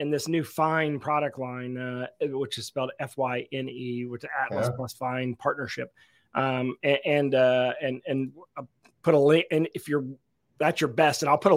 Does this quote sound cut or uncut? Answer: uncut